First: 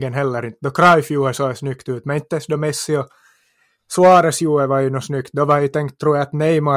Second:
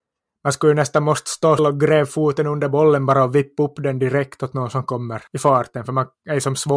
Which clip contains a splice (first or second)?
second